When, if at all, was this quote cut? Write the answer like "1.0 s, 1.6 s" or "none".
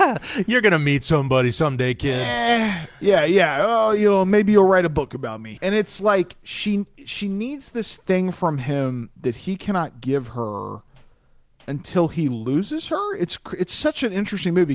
5.6 s